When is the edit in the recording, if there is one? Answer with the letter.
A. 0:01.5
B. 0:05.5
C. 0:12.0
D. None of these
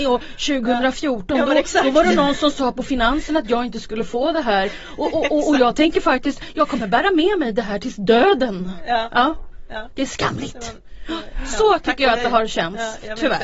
D